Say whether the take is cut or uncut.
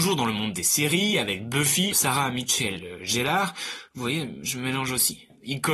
cut